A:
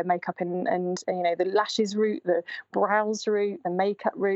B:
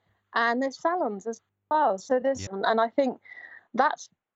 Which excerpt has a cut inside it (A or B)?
B